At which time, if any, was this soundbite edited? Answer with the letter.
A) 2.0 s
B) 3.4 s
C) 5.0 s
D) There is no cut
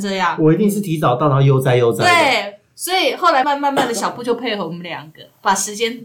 B